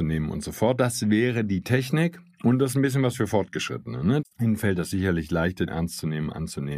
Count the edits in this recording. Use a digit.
2